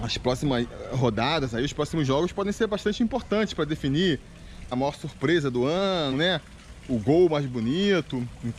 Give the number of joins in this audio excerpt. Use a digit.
2